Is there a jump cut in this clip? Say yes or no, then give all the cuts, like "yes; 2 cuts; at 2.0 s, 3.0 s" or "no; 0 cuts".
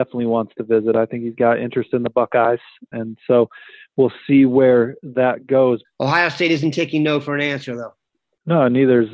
yes; 2 cuts; at 2.9 s, 5.8 s